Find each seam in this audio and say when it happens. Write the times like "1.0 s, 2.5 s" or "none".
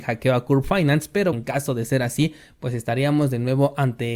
1.3 s